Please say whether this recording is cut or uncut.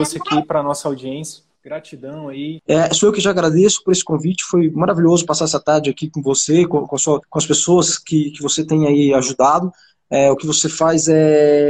cut